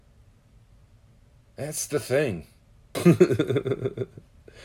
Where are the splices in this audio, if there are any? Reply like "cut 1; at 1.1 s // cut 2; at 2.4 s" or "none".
cut 1; at 2.9 s